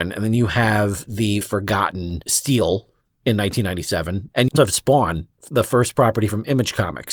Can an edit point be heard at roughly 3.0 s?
no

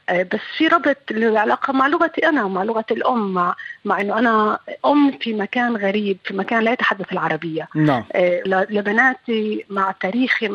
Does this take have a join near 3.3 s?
no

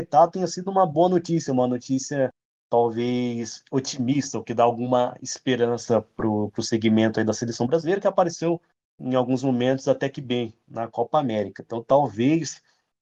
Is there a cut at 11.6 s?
no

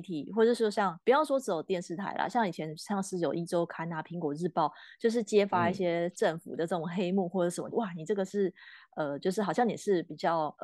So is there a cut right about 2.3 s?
no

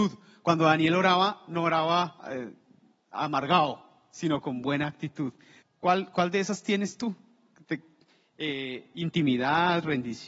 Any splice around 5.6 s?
yes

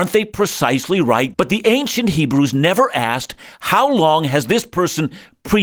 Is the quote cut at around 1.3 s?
yes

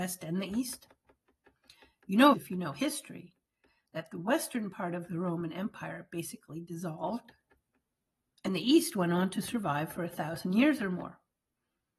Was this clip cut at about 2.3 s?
yes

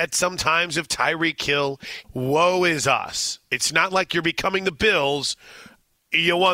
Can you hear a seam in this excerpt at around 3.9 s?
no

